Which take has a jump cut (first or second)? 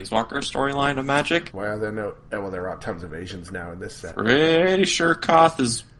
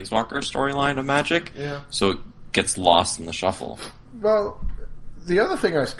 first